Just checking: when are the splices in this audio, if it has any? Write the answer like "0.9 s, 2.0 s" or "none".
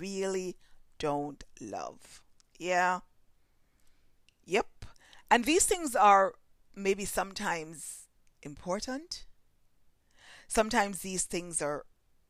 none